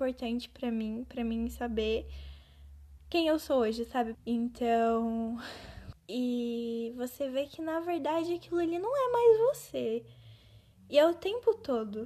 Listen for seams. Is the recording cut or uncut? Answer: cut